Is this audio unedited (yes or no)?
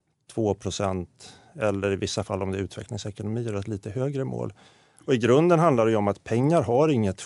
yes